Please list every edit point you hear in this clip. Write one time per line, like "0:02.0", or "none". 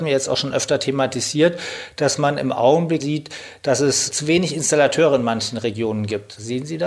0:03.0